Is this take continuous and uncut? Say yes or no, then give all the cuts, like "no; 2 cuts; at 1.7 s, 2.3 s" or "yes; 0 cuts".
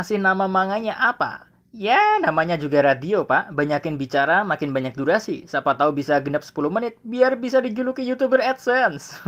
yes; 0 cuts